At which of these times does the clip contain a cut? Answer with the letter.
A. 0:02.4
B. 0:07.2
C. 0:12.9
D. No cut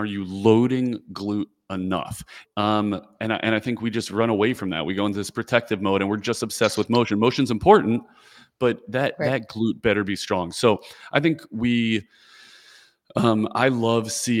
A